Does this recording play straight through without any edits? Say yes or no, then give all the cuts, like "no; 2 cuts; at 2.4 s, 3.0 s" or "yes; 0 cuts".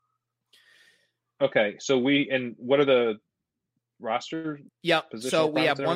no; 1 cut; at 4.7 s